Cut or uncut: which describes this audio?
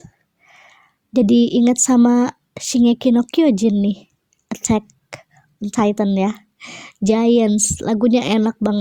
uncut